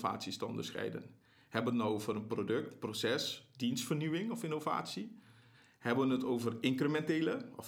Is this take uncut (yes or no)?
yes